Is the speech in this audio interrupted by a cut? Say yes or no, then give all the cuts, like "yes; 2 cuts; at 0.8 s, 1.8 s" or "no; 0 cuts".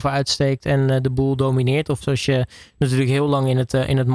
yes; 1 cut; at 2.0 s